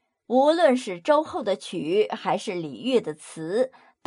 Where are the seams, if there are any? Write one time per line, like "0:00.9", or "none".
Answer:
none